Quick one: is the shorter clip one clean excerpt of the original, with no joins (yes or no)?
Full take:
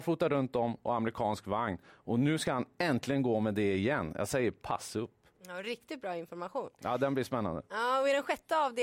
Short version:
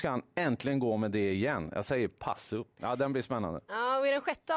no